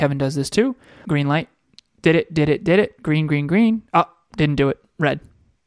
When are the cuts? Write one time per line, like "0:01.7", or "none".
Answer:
0:01.0